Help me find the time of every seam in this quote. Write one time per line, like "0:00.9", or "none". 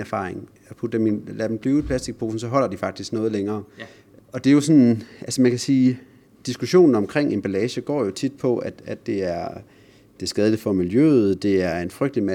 0:04.2